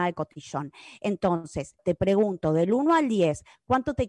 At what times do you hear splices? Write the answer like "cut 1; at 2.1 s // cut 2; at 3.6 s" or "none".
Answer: cut 1; at 1.8 s